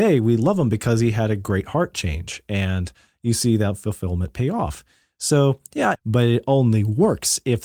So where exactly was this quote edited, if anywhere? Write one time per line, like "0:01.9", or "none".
0:05.9

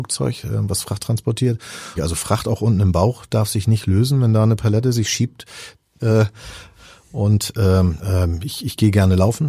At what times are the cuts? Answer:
0:02.0
0:06.0
0:08.0

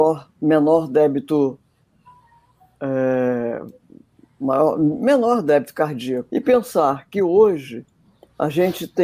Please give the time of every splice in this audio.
0:06.3

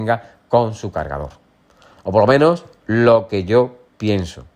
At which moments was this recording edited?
none

